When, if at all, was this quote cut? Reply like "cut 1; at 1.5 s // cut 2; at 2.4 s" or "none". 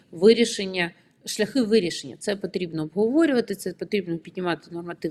none